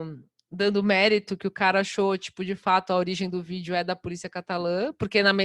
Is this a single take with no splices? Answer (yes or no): yes